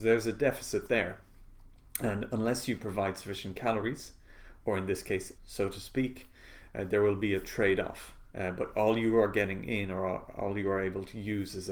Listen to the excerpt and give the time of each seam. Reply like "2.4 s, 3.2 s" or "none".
5.4 s, 8.3 s